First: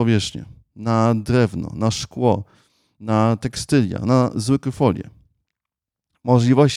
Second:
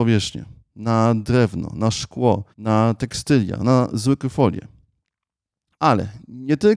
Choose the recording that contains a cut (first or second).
second